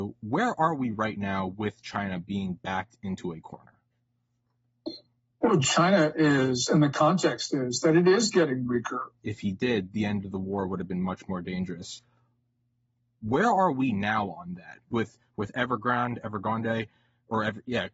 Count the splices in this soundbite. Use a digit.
1